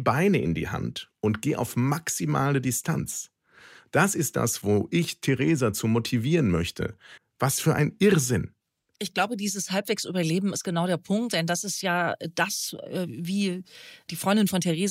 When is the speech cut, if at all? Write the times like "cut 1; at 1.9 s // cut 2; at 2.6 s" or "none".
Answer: cut 1; at 7.2 s